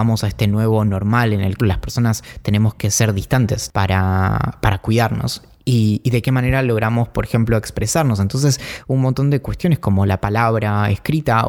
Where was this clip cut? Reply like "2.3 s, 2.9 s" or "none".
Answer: 1.6 s